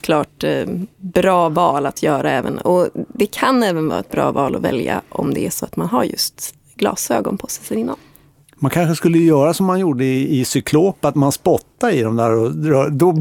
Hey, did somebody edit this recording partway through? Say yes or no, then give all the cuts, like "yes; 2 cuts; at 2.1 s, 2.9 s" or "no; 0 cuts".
no; 0 cuts